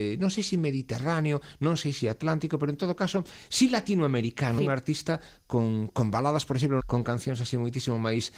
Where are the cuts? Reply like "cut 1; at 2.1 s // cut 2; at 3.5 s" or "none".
cut 1; at 4.6 s // cut 2; at 6.8 s